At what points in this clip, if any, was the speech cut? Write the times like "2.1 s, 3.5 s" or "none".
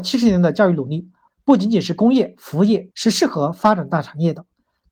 1.3 s, 2.9 s